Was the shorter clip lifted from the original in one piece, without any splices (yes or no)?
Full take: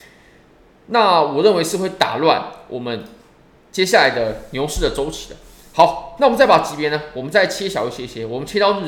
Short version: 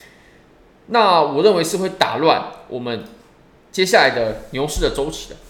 yes